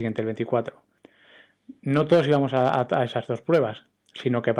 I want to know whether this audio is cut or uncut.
uncut